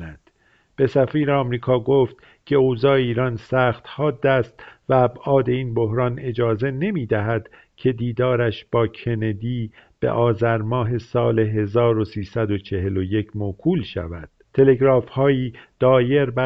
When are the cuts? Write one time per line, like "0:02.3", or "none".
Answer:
0:14.4